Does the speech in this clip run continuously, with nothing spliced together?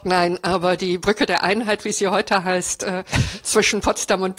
yes; 0 cuts

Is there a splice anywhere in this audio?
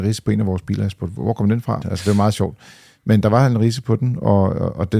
yes; 1 cut; at 1.8 s

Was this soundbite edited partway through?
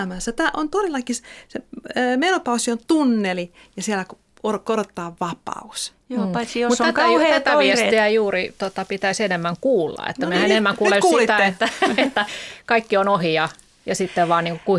no; 0 cuts

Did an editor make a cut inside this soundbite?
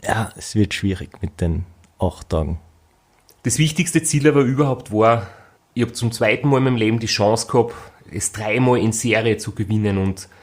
no; 0 cuts

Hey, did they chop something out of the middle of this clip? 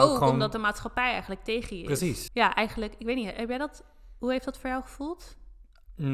yes; 1 cut; at 2.3 s

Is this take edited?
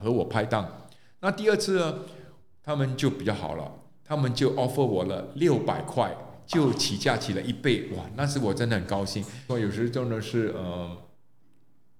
yes; 1 cut; at 9.5 s

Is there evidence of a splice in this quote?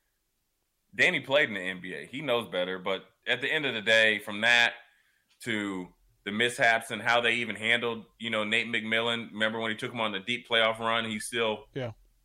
no; 0 cuts

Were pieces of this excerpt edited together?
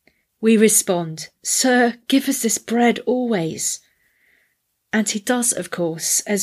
no; 0 cuts

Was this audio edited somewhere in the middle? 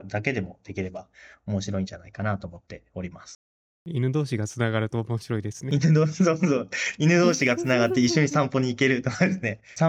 no; 0 cuts

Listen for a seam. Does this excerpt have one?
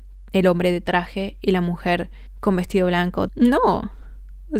yes; 1 cut; at 3.3 s

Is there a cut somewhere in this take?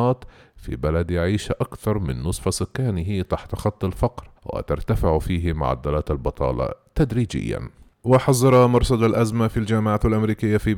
yes; 1 cut; at 4.4 s

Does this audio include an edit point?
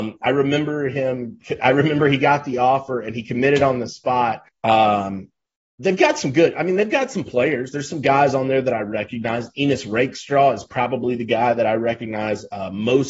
yes; 1 cut; at 4.5 s

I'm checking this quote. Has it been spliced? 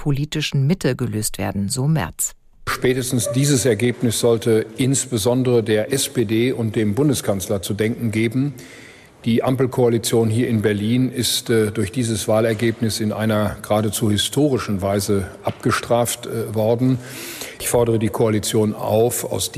no; 0 cuts

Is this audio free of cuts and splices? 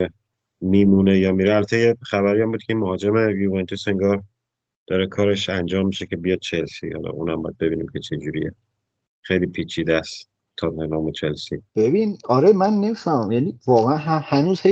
no; 1 cut; at 11.7 s

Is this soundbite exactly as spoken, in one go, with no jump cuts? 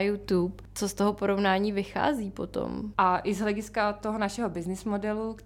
no; 1 cut; at 2.9 s

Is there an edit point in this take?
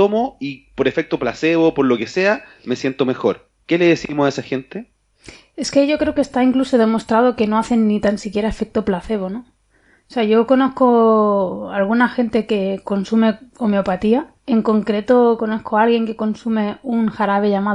yes; 1 cut; at 14.4 s

